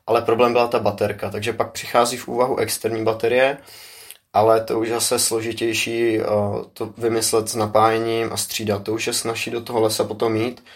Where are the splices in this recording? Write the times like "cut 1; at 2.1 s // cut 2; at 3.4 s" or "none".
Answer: none